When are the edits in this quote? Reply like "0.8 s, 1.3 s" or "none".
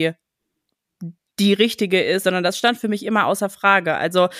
2.2 s